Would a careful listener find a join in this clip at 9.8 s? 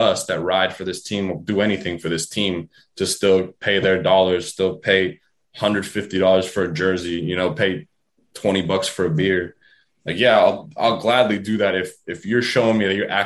no; 0 cuts

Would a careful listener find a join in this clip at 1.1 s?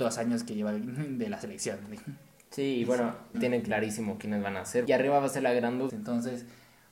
no; 3 cuts; at 3.3 s, 4.9 s, 5.9 s

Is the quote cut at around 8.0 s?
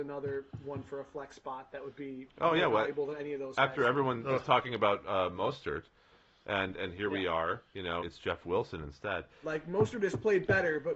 yes; 2 cuts; at 8.0 s, 9.4 s

